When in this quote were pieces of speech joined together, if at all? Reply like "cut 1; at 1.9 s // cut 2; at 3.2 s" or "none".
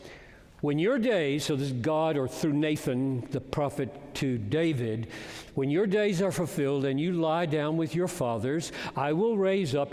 none